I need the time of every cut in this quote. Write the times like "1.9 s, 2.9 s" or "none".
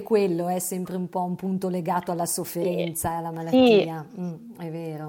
none